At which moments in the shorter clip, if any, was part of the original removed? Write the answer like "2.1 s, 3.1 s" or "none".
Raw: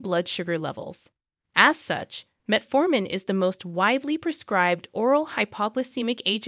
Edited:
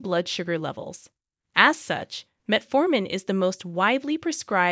none